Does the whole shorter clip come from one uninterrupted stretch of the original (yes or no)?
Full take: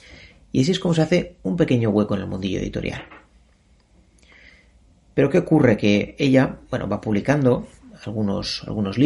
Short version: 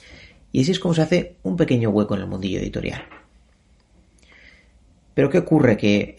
yes